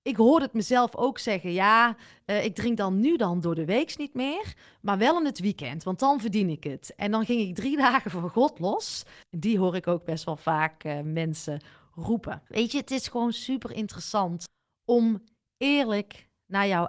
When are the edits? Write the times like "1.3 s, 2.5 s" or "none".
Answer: 9.2 s, 12.5 s